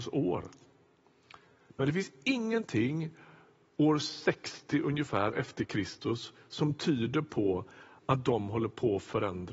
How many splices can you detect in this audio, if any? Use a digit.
0